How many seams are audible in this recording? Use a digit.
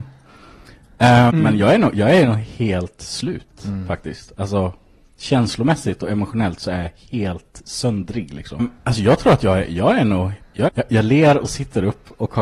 3